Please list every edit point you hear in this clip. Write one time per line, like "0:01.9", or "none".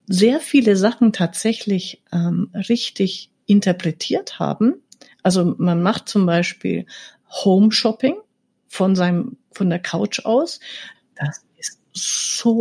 0:10.9